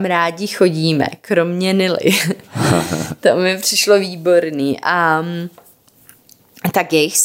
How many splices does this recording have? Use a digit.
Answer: 0